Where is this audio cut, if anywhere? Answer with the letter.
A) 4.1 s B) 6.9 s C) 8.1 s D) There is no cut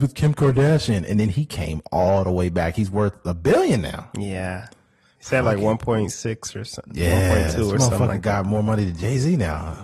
D